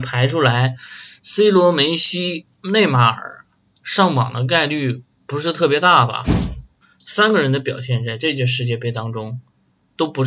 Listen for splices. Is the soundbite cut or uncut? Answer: uncut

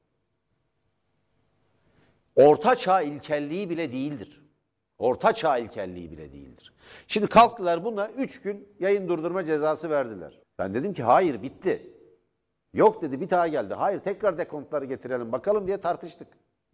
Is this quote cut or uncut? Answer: cut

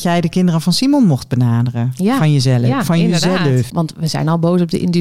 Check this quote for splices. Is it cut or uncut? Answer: cut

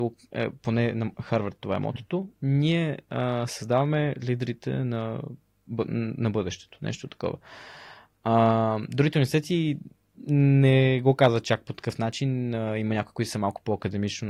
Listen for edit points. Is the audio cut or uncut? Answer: uncut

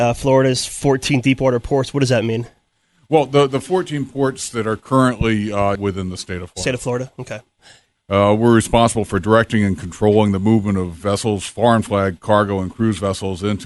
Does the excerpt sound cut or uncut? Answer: cut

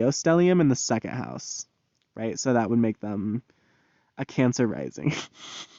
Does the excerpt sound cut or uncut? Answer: uncut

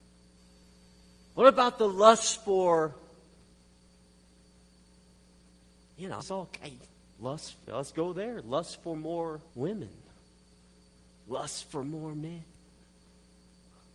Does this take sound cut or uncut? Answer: cut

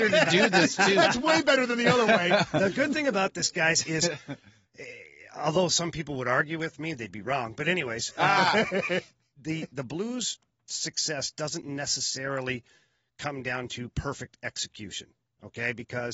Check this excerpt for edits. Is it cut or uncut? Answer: uncut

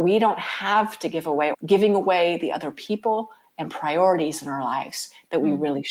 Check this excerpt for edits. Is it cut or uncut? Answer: cut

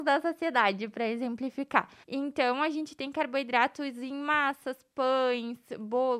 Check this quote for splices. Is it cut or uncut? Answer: cut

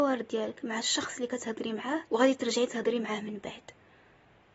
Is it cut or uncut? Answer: cut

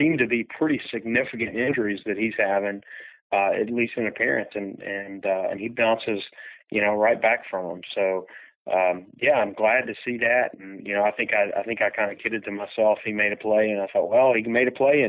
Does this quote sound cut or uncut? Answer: uncut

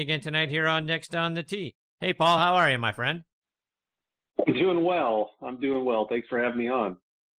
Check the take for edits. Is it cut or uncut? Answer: uncut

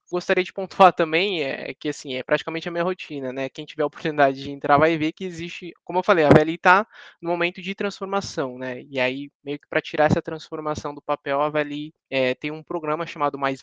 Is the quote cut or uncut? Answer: uncut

